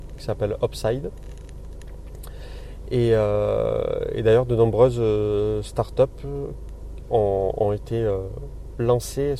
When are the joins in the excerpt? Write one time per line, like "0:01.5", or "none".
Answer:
none